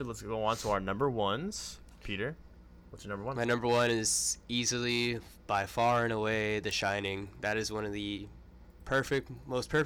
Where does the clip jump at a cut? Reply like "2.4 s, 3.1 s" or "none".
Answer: none